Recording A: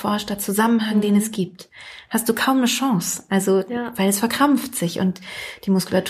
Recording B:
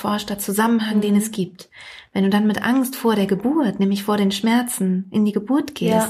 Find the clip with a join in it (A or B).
A